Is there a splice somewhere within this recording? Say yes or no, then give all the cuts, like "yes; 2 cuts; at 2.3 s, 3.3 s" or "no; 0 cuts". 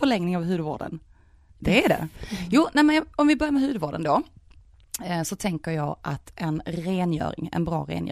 no; 0 cuts